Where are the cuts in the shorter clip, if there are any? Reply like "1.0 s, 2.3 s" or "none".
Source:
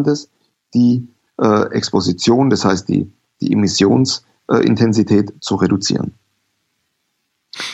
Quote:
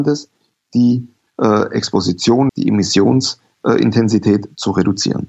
2.5 s